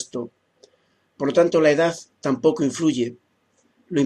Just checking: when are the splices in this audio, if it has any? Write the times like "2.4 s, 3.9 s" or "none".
none

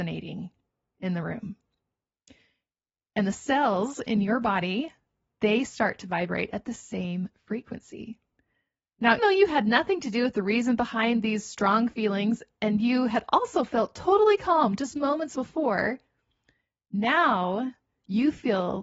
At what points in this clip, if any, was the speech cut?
9.2 s

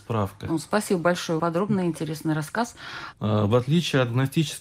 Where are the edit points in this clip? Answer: 1.4 s, 3.1 s

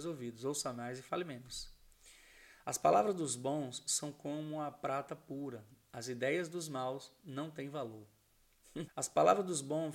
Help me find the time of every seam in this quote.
8.9 s

